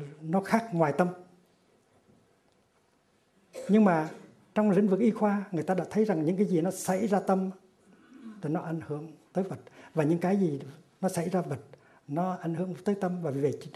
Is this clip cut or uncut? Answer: uncut